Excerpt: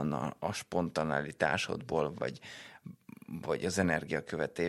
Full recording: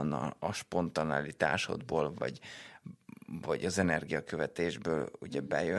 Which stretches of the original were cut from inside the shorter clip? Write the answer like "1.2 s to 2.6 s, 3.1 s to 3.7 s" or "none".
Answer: none